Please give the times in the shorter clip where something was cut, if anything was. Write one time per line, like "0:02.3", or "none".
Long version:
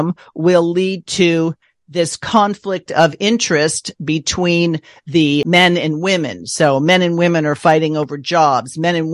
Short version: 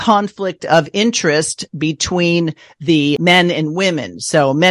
none